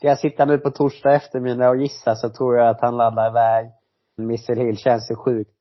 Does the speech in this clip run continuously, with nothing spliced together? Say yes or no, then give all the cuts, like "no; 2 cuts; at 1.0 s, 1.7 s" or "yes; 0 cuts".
no; 1 cut; at 4.2 s